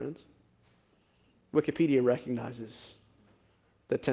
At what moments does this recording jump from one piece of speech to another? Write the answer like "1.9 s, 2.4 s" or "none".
none